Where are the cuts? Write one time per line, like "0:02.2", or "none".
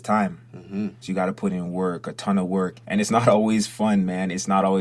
0:01.0
0:02.8